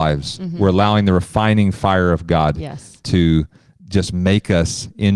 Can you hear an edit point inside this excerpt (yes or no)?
no